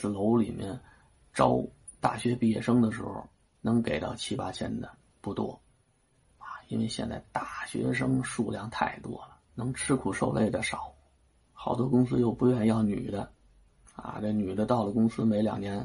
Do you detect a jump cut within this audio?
no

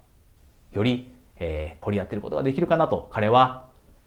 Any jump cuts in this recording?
yes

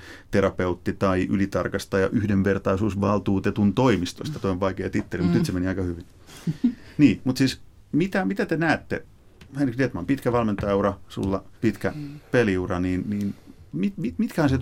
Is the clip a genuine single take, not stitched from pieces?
no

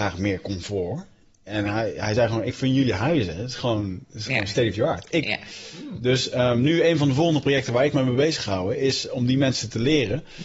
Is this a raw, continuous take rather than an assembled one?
no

